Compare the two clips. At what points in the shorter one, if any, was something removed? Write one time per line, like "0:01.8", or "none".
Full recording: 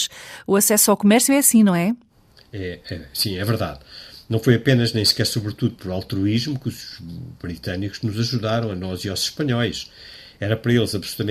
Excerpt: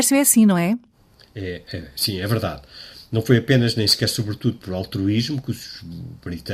none